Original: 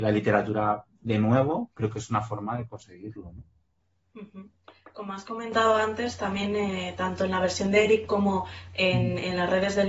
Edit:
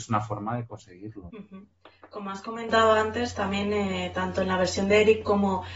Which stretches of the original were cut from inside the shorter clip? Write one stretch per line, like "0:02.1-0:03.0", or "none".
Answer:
0:03.3-0:04.1